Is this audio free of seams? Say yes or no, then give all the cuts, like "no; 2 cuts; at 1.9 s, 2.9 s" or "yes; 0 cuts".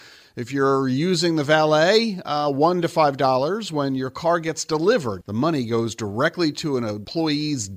no; 1 cut; at 5.2 s